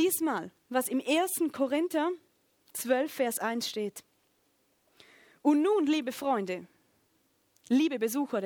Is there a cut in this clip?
no; 0 cuts

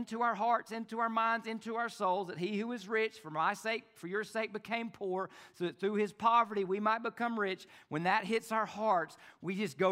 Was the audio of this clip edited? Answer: no; 0 cuts

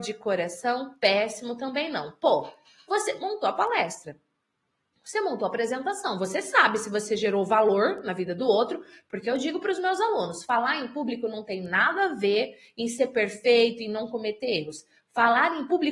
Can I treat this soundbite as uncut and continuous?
yes; 0 cuts

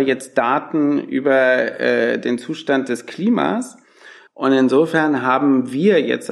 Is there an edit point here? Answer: yes; 1 cut; at 4.3 s

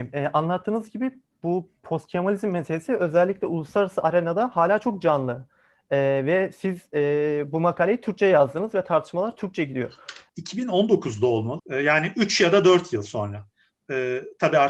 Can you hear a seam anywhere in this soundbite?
yes; 2 cuts; at 10.3 s, 11.6 s

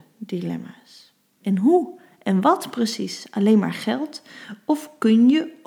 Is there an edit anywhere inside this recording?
yes; 1 cut; at 1.4 s

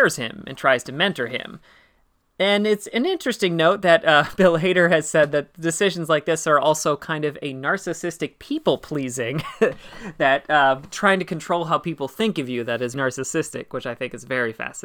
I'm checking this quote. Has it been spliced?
yes; 1 cut; at 12.9 s

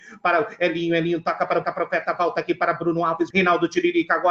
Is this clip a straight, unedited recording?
no; 2 cuts; at 1.6 s, 3.3 s

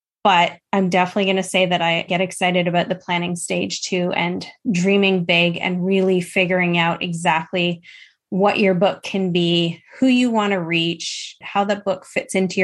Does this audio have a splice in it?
yes; 1 cut; at 11.4 s

